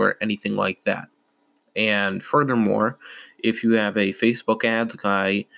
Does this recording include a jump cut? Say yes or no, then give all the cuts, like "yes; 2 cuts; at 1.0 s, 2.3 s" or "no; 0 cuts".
no; 0 cuts